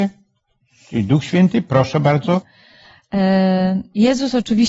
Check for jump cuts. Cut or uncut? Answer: cut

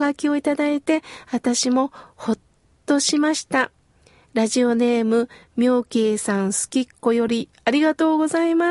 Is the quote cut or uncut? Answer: uncut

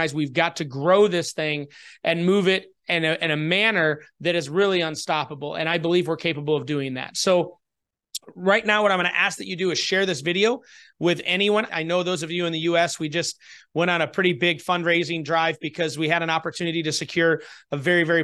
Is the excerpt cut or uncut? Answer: cut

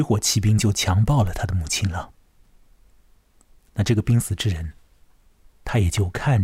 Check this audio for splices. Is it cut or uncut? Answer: uncut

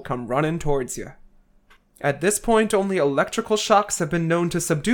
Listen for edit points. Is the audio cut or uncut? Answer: uncut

